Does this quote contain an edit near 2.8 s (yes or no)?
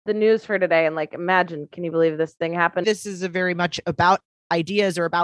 yes